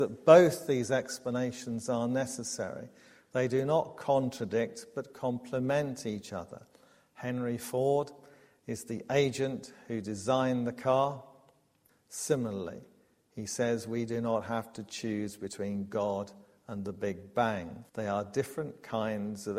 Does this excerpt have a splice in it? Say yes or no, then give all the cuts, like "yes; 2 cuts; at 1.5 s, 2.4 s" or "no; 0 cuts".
yes; 2 cuts; at 11.9 s, 17.9 s